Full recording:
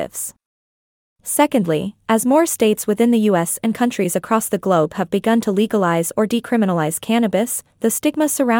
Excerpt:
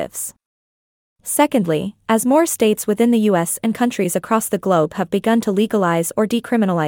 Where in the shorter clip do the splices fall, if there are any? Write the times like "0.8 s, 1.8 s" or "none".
none